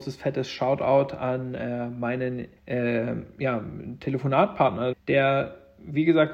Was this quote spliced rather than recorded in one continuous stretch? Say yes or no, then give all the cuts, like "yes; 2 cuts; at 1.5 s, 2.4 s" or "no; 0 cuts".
yes; 2 cuts; at 2.6 s, 4.9 s